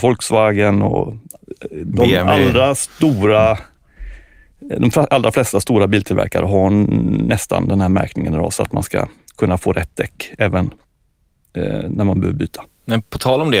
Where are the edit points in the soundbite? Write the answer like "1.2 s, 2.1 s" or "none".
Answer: none